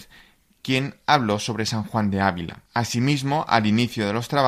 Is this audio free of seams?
no; 1 cut; at 2.7 s

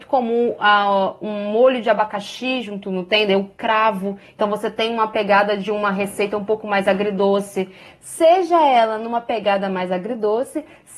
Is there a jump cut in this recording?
yes; 1 cut; at 7.9 s

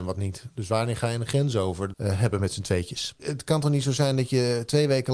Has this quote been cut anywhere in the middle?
yes; 2 cuts; at 1.9 s, 3.2 s

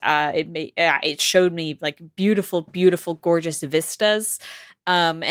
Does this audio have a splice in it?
no; 0 cuts

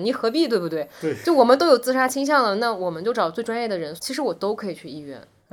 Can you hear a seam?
yes; 1 cut; at 4.0 s

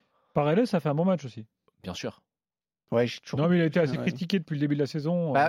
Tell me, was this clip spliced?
no; 0 cuts

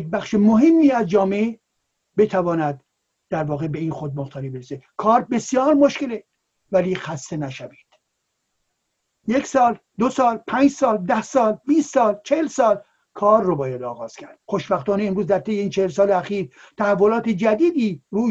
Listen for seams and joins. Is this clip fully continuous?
no; 1 cut; at 14.4 s

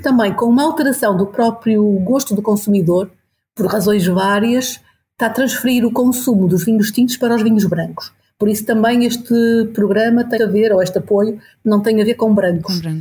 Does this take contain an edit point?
yes; 2 cuts; at 10.4 s, 11.6 s

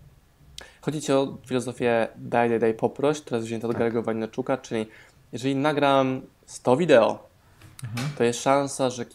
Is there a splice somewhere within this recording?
no; 0 cuts

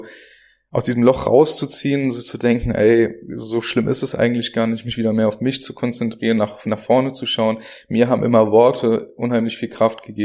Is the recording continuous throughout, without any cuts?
yes; 0 cuts

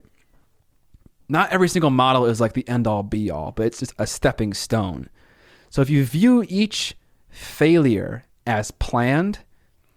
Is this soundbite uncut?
yes; 0 cuts

